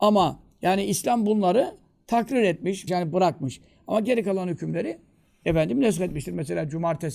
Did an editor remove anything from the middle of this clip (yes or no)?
yes